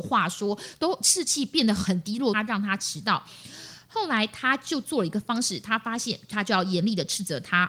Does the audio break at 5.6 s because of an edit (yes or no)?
no